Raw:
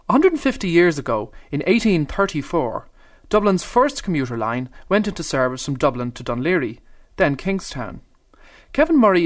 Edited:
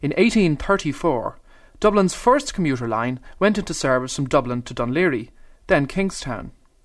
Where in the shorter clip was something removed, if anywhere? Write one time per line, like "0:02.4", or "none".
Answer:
none